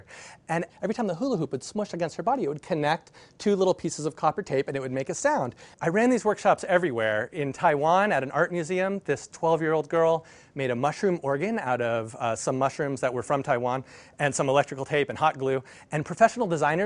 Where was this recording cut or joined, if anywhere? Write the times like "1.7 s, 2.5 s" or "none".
5.7 s